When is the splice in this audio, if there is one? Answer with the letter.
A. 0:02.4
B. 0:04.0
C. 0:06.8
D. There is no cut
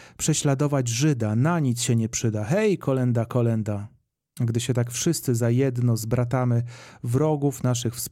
D